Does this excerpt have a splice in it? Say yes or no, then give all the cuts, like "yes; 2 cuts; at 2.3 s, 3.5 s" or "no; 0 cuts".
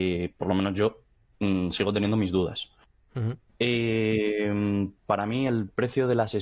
no; 0 cuts